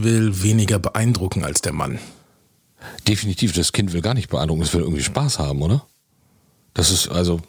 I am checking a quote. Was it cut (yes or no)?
no